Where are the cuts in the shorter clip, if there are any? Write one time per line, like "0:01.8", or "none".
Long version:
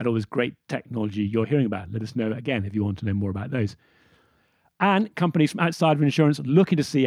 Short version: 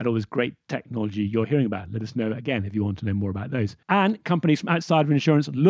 0:03.8